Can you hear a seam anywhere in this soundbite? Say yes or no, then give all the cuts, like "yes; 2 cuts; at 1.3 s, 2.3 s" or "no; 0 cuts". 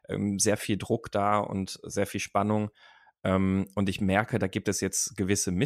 no; 0 cuts